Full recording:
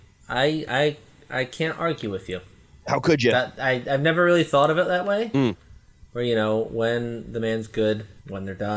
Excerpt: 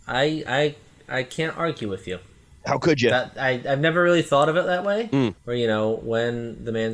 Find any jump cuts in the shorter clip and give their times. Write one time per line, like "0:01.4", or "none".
0:05.4